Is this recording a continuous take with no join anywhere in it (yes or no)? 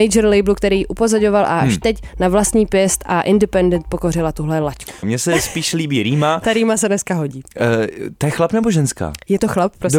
no